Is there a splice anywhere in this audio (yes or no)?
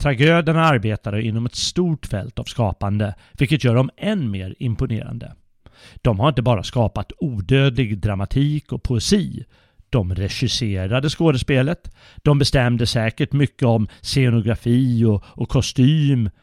no